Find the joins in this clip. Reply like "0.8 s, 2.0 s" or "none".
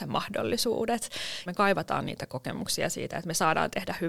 1.5 s